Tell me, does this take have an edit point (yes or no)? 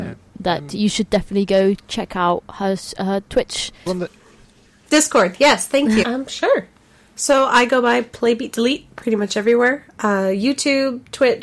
yes